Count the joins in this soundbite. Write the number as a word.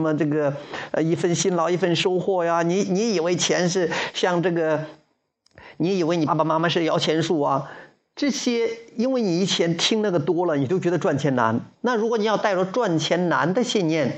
one